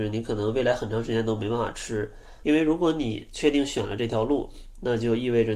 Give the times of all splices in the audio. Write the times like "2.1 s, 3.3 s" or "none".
2.4 s